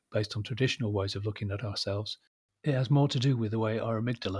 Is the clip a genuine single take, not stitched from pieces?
yes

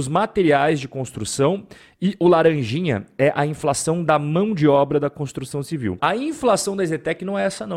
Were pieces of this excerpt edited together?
yes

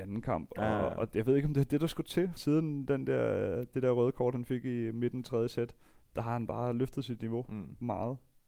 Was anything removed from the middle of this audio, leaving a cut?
yes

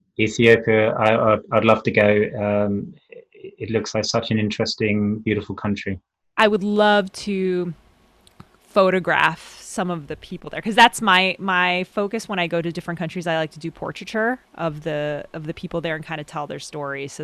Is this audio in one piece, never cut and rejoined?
yes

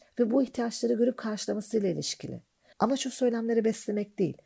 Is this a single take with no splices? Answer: no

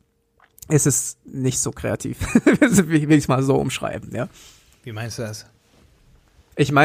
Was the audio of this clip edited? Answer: no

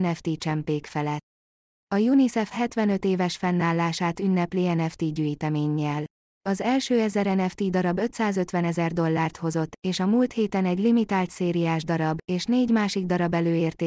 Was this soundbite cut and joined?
yes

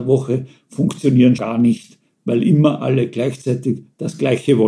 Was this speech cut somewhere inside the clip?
yes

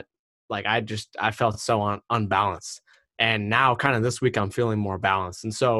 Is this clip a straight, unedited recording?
yes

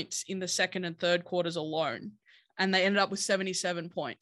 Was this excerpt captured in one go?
yes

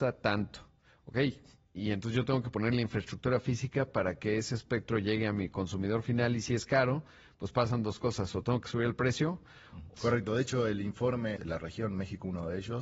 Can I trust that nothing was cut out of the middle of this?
no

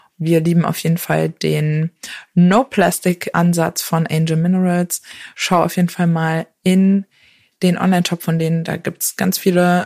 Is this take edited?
no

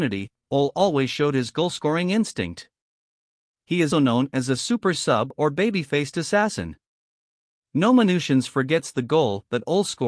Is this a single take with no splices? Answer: no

